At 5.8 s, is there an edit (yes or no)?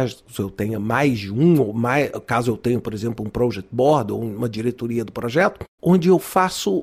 yes